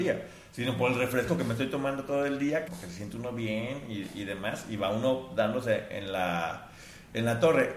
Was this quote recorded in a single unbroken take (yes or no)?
no